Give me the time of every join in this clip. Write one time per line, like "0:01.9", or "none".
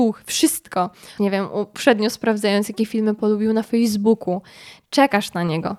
0:01.2